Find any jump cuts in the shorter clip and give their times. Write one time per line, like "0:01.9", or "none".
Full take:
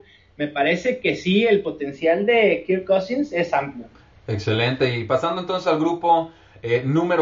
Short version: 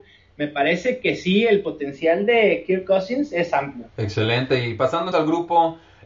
0:03.9
0:05.1